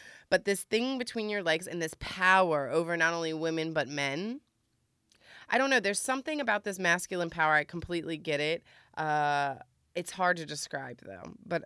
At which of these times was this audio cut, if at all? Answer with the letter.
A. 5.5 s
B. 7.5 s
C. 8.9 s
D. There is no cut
D